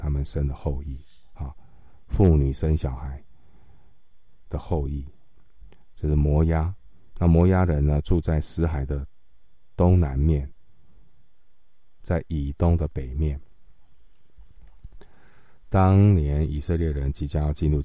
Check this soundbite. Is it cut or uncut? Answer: uncut